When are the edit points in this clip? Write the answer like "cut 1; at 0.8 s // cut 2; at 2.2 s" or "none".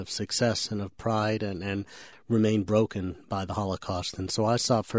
cut 1; at 2.1 s